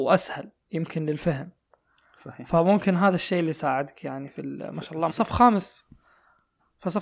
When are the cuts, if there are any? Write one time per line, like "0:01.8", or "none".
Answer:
0:05.1